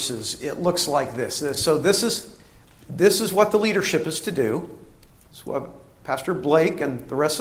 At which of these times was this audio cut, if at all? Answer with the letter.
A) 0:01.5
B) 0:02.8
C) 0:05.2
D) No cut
D